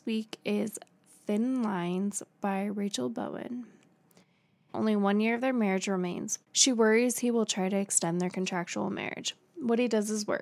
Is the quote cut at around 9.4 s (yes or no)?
no